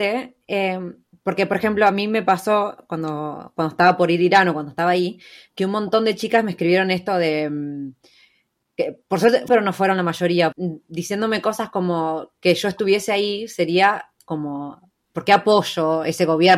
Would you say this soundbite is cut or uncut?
cut